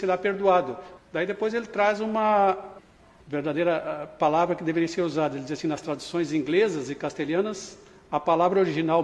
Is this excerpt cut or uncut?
cut